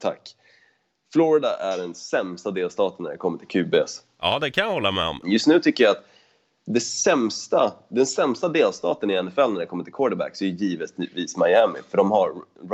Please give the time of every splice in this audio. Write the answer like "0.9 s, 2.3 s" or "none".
5.2 s